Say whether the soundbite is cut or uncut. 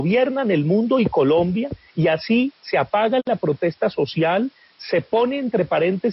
uncut